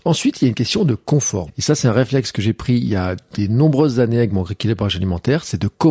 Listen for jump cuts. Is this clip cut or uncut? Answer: cut